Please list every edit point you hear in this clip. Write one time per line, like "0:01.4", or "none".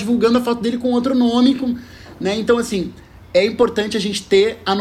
none

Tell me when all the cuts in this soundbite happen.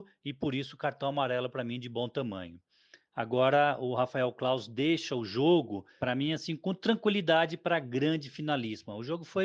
none

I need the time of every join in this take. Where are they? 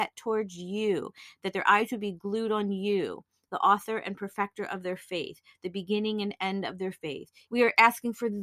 0:07.5

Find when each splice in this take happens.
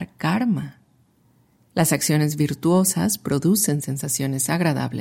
0:01.6

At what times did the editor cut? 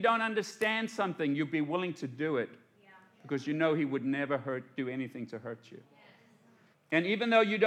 0:06.7

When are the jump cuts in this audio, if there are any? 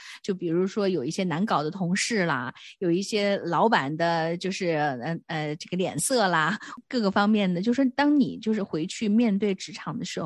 none

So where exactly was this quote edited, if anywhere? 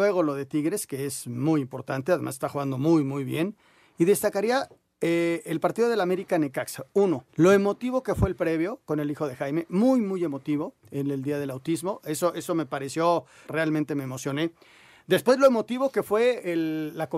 0:07.3
0:13.4

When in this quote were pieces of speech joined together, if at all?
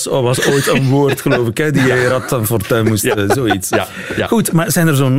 none

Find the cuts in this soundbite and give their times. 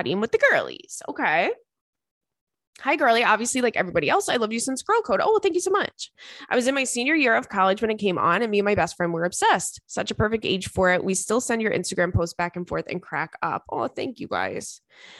none

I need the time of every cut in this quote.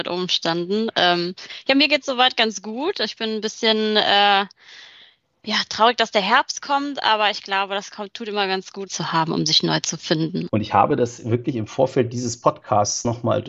0:08.9
0:10.5

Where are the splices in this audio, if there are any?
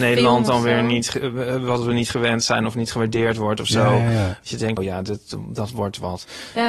0:04.8

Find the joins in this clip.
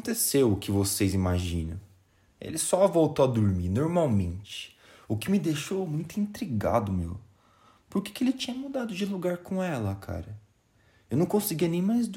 none

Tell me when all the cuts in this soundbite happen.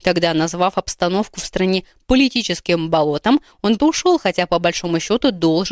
0:03.8

